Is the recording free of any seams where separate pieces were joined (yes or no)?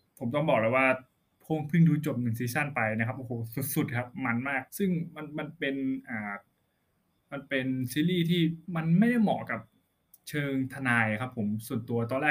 no